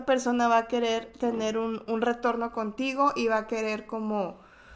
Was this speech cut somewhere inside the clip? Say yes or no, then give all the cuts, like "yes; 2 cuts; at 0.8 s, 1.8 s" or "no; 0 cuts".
yes; 1 cut; at 1.9 s